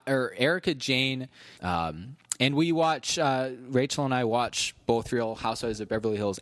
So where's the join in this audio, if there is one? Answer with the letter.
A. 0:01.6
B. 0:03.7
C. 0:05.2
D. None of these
A